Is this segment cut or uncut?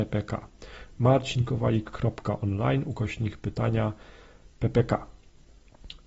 uncut